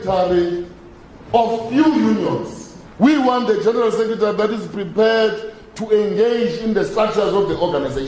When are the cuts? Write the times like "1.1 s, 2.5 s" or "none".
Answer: 2.9 s